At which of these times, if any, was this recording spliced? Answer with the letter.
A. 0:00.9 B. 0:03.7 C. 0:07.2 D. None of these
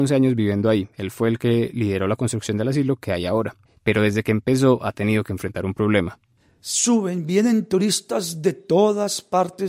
D